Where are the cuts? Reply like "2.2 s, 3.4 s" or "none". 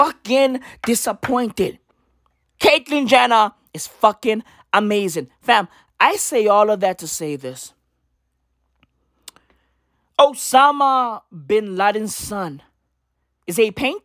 2.4 s